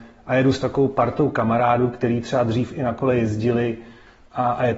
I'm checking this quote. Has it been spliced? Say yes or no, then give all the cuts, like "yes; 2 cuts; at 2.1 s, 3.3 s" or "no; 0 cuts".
no; 0 cuts